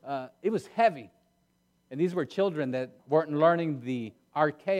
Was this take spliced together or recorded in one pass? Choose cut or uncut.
cut